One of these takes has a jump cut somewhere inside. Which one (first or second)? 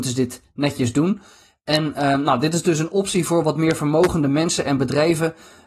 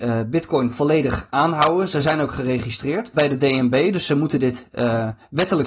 second